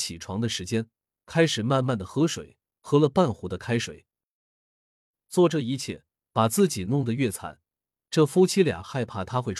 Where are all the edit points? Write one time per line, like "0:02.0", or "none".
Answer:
none